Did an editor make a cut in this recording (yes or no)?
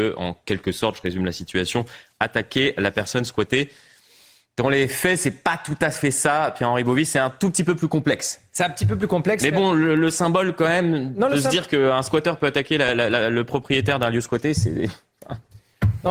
no